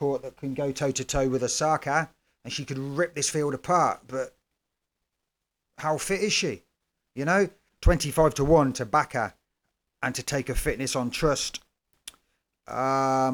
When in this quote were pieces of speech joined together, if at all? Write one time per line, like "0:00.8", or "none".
0:07.7